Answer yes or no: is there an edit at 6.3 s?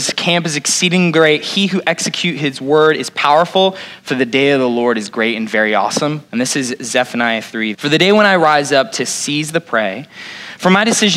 yes